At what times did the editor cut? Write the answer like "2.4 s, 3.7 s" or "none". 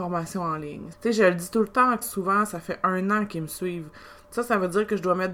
0.9 s, 2.0 s

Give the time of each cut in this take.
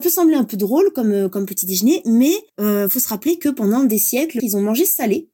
2.5 s, 4.4 s

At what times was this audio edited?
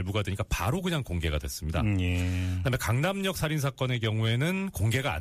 none

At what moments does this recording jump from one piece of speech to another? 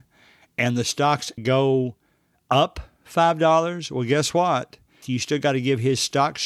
1.4 s, 5.0 s

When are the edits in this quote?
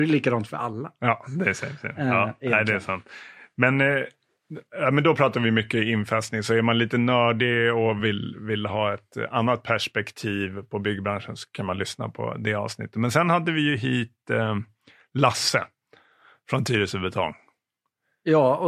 none

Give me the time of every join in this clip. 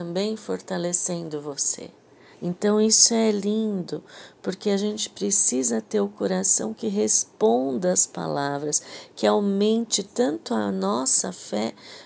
2.3 s

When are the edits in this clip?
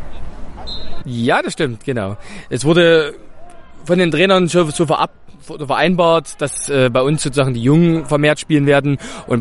1.0 s

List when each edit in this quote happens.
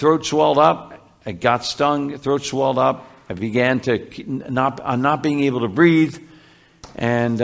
none

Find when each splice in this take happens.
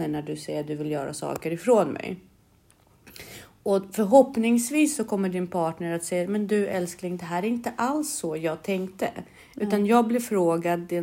none

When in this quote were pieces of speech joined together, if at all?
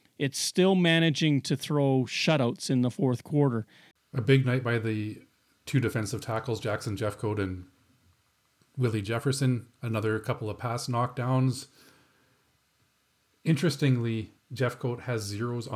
3.9 s

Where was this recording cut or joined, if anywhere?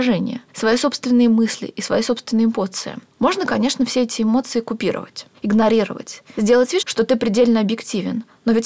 6.8 s

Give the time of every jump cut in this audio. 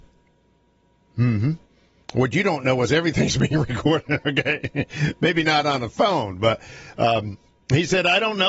none

